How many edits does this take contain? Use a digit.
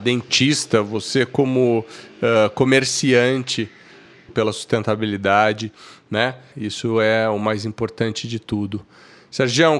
2